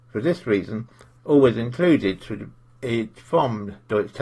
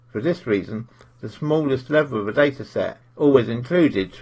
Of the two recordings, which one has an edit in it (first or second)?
first